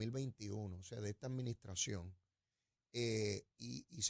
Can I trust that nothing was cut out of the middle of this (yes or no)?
yes